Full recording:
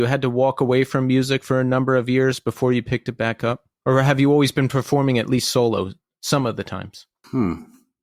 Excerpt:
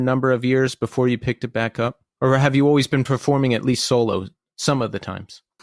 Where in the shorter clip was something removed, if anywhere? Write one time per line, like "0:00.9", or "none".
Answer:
none